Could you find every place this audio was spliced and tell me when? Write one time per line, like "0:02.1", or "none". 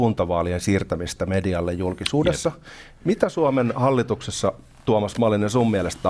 none